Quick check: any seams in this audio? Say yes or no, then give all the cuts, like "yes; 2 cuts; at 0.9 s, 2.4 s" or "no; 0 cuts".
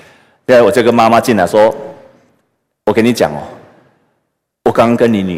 no; 0 cuts